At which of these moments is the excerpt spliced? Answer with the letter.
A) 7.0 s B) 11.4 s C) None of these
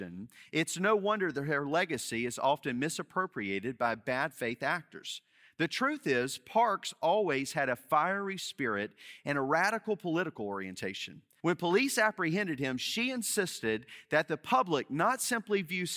B